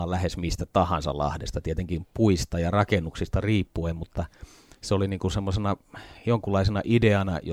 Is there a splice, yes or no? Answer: no